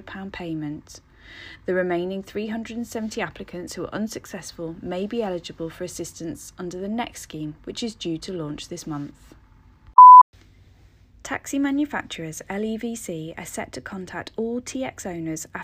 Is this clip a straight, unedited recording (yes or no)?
yes